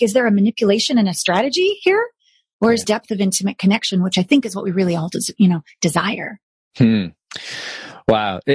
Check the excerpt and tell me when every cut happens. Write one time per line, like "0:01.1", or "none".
0:02.8